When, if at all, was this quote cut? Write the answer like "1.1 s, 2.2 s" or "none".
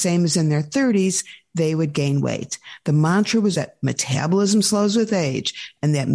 3.5 s